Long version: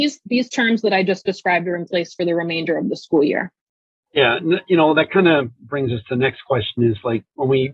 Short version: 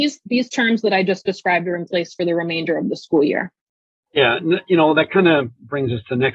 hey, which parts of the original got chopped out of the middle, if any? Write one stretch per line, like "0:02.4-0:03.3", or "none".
none